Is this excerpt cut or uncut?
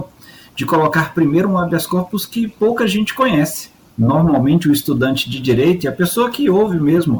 uncut